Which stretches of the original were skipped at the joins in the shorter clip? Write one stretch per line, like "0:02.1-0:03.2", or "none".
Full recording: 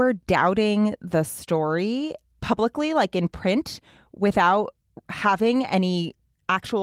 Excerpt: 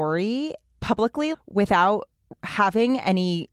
0:02.9-0:04.0